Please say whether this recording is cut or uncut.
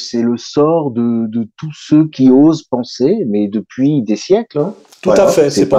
uncut